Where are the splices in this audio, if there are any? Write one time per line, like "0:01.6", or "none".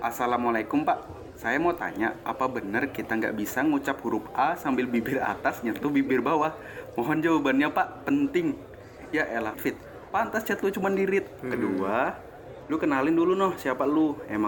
0:09.5
0:11.4